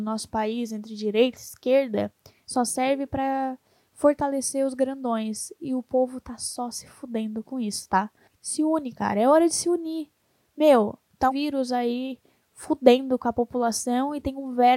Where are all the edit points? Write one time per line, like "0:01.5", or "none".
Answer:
0:08.3
0:11.3